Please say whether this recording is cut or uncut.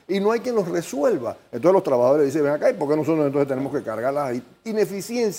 uncut